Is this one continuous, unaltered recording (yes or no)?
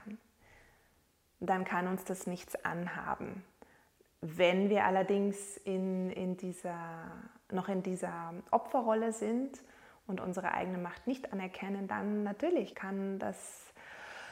no